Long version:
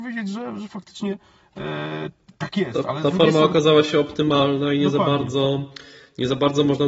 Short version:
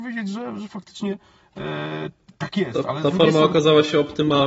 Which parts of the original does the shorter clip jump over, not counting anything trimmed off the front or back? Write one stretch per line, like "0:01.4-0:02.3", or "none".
none